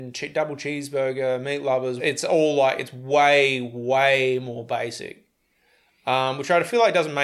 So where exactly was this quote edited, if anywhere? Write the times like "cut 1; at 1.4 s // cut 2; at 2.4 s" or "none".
cut 1; at 2.0 s